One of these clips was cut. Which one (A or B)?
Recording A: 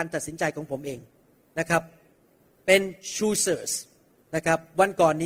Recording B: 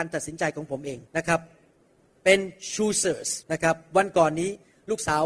B